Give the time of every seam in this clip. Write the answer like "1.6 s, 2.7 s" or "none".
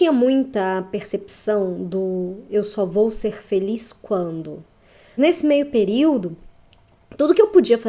5.2 s